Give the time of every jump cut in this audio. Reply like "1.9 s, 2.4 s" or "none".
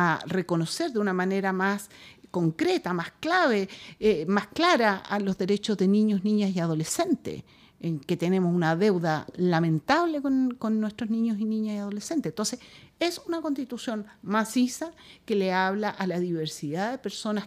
none